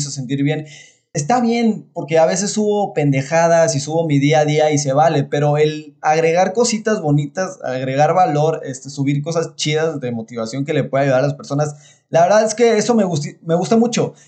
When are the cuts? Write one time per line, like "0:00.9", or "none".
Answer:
0:01.1